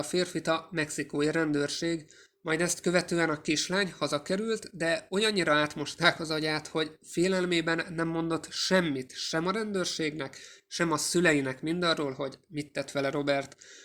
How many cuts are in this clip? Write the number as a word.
zero